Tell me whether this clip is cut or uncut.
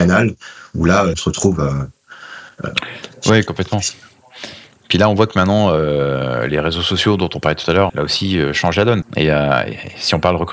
cut